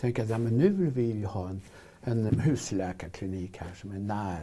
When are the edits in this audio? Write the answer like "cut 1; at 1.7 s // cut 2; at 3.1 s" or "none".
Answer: cut 1; at 2.3 s